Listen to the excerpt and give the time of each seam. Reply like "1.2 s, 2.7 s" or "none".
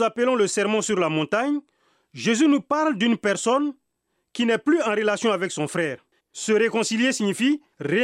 6.2 s